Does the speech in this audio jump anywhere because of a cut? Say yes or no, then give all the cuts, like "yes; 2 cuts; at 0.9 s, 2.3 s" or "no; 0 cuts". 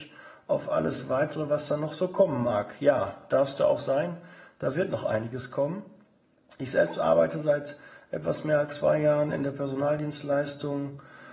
no; 0 cuts